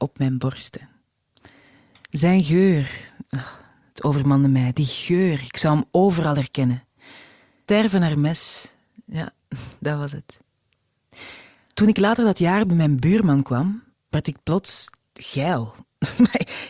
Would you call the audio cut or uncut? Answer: uncut